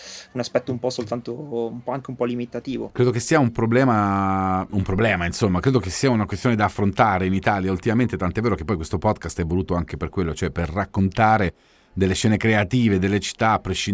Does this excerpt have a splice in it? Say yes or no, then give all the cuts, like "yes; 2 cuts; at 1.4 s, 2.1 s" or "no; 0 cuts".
no; 0 cuts